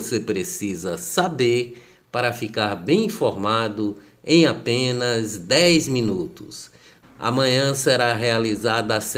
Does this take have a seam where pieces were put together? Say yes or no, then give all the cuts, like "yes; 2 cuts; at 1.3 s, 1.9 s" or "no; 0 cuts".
yes; 1 cut; at 7.0 s